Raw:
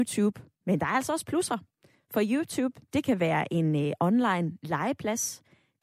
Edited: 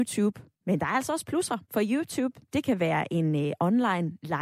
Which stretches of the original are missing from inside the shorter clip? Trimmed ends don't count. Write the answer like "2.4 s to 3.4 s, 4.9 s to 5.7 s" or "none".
1.6 s to 2.0 s